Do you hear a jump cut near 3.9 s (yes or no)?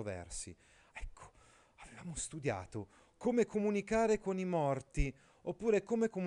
no